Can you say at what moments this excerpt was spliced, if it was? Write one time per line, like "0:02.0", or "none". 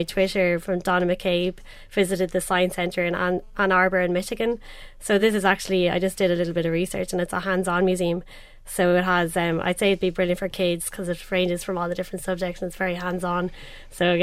none

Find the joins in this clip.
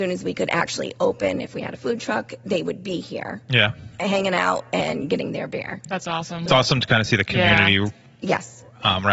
none

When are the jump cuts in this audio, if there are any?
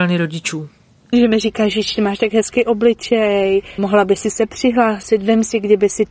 0:01.1
0:03.8

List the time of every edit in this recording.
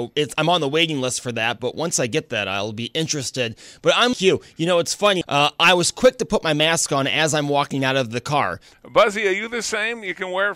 0:04.1
0:05.2
0:08.7

